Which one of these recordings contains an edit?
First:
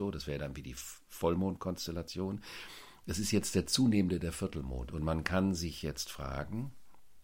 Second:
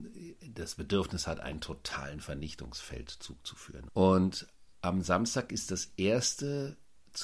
second; 1 cut; at 3.9 s

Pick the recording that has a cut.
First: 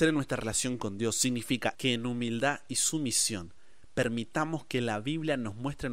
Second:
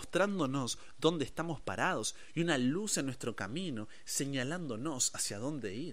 first; 1 cut; at 1.7 s

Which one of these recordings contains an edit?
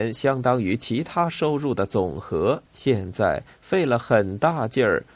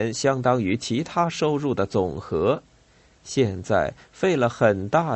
first; 1 cut; at 2.7 s

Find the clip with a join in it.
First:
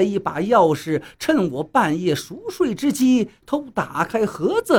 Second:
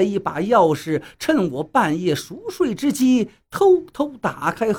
first; 1 cut; at 3.4 s

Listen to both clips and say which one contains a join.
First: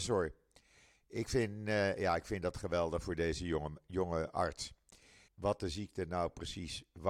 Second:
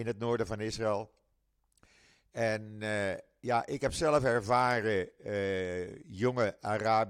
first; 1 cut; at 5.3 s

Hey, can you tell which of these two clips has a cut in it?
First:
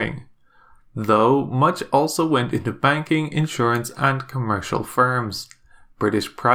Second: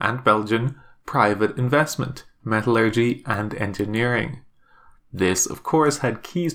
second; 2 cuts; at 2.4 s, 5.0 s

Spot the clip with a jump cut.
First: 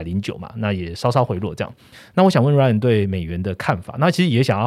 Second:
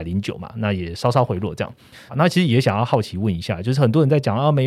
second; 1 cut; at 2.1 s

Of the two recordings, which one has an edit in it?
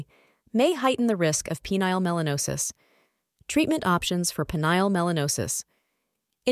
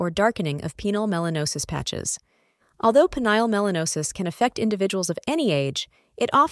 second; 1 cut; at 2.6 s

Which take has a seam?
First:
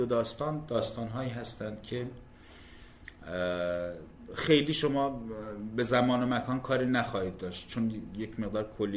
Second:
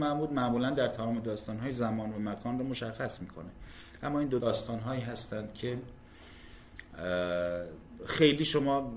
second; 1 cut; at 4.4 s

